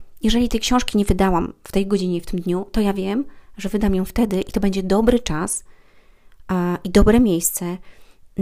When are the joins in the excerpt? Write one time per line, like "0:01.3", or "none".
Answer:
none